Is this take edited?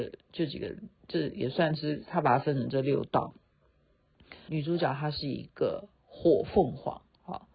yes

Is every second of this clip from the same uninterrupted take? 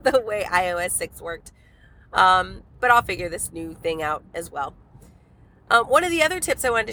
yes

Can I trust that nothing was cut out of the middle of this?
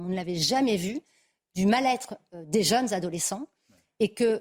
yes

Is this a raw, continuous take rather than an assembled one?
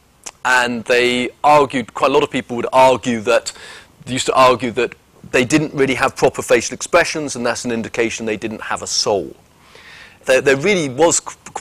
no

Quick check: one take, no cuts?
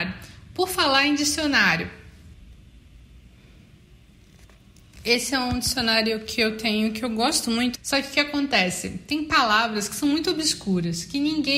no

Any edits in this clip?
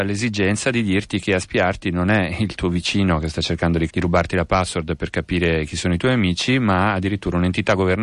yes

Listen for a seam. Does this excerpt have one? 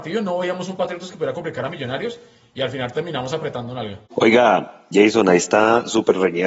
yes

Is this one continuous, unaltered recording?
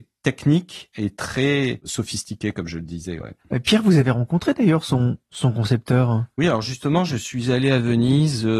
yes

